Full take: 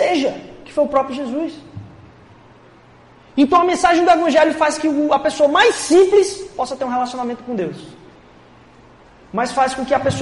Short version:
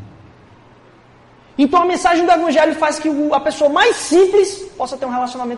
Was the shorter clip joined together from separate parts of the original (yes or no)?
no